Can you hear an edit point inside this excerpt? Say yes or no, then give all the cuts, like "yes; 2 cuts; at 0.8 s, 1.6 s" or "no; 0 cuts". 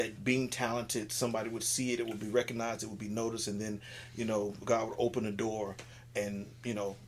no; 0 cuts